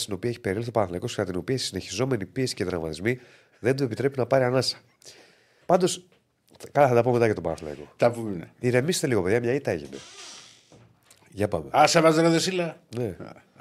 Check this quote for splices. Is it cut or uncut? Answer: cut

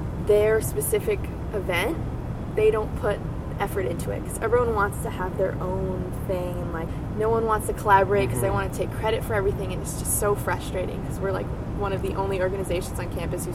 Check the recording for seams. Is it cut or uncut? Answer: uncut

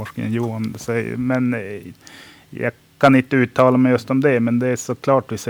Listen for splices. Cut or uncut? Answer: uncut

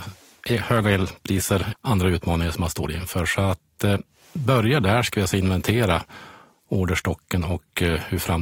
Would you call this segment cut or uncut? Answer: cut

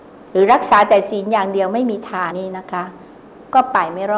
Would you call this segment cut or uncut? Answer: cut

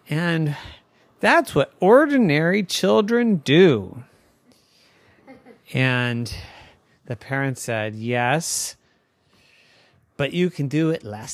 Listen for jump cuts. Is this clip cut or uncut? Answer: uncut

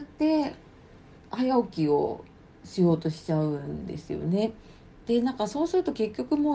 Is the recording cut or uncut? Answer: uncut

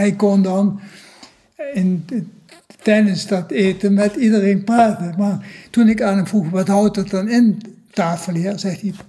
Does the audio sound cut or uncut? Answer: uncut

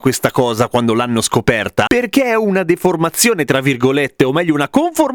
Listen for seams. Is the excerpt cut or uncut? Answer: uncut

